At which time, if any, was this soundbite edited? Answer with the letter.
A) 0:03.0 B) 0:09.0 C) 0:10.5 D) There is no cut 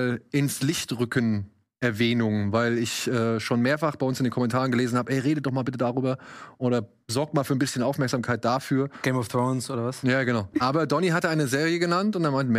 C